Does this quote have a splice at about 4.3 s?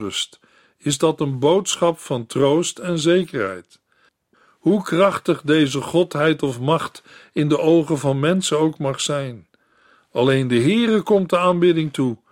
yes; 1 cut; at 4.3 s

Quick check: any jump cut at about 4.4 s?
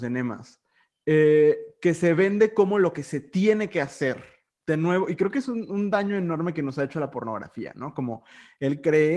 no; 0 cuts

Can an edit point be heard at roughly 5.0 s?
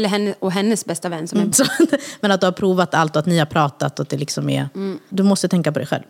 no; 1 cut; at 1.5 s

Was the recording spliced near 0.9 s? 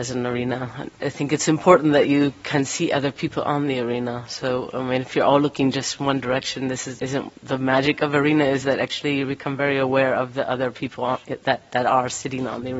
no; 0 cuts

